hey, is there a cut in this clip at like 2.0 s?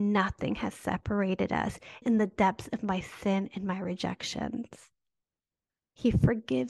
yes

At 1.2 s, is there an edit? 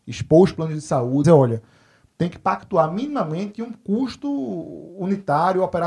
yes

